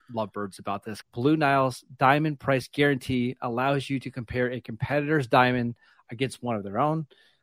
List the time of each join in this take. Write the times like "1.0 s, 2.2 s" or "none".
1.0 s